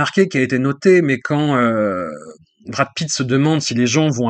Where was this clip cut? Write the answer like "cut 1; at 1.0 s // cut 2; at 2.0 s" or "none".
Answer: none